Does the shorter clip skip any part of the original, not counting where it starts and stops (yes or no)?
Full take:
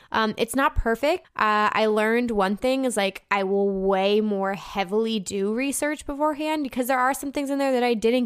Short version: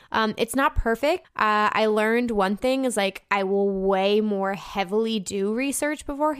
no